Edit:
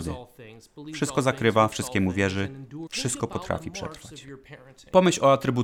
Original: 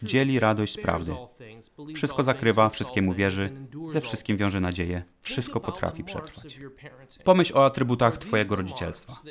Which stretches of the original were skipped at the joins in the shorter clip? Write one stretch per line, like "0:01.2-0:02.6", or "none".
0:03.9-0:05.2